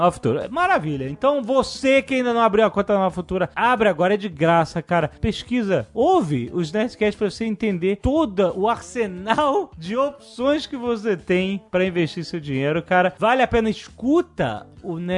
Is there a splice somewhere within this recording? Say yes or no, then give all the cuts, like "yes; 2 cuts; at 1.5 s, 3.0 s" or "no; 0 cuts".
no; 0 cuts